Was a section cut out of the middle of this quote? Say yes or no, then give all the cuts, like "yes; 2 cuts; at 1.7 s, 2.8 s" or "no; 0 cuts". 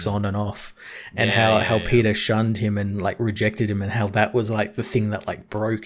no; 0 cuts